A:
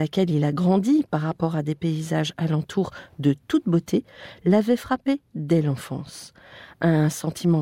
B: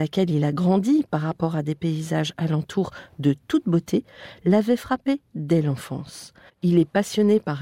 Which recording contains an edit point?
B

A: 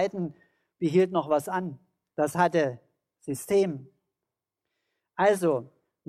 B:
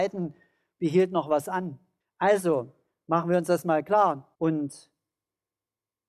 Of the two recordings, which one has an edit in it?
B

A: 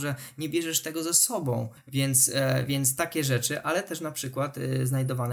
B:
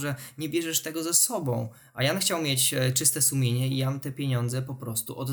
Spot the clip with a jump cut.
A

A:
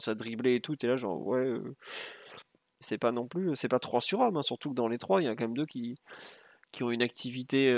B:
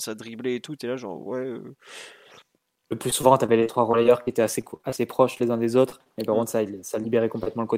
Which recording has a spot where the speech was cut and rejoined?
A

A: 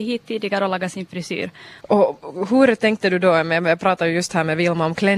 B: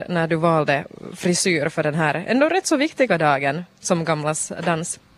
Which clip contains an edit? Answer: A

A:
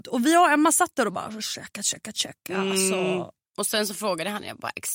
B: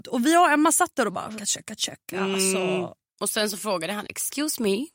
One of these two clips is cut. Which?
B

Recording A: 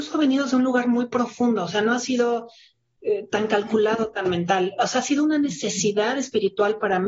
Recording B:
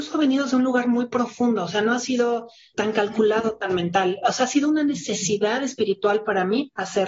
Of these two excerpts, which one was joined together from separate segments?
B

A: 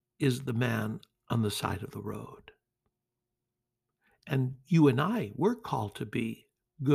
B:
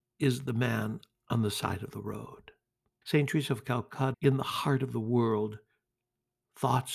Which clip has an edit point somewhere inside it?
B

